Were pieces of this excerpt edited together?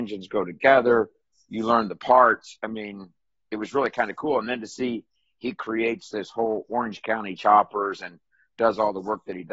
no; 0 cuts

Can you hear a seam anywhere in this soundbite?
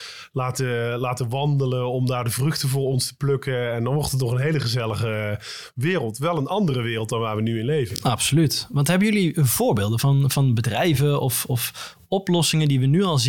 no; 0 cuts

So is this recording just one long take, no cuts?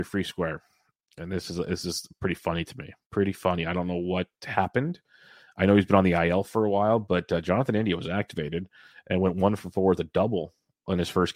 yes; 0 cuts

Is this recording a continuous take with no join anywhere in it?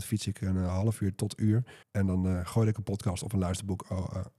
no; 1 cut; at 1.8 s

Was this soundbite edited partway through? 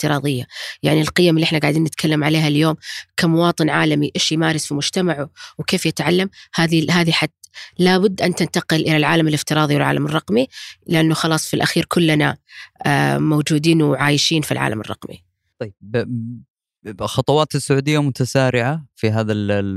no; 0 cuts

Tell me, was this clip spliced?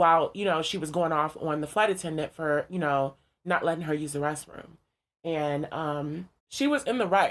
yes; 1 cut; at 6.4 s

